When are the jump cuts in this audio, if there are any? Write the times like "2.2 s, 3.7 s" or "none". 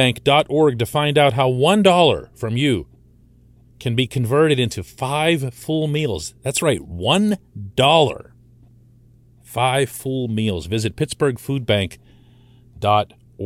none

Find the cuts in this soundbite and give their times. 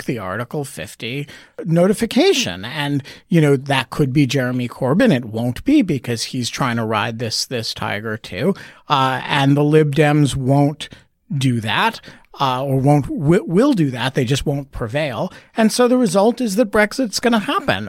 none

